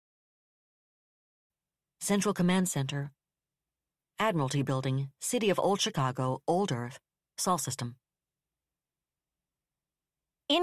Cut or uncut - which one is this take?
uncut